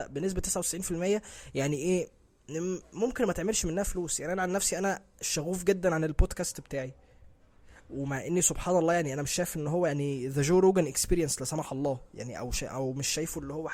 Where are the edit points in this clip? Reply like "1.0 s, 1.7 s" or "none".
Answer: none